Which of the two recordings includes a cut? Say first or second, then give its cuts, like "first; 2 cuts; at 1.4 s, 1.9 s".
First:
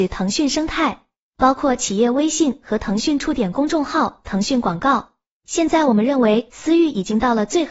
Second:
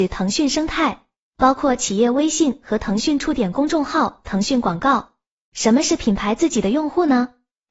second; 1 cut; at 5.4 s